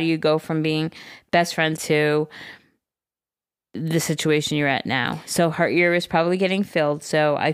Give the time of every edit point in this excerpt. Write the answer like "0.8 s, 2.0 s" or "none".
1.8 s